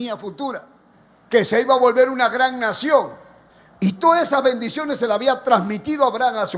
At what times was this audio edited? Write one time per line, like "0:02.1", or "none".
none